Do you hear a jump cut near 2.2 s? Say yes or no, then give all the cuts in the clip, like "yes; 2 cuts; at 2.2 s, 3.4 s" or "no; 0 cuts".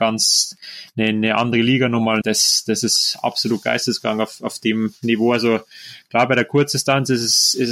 yes; 1 cut; at 2.2 s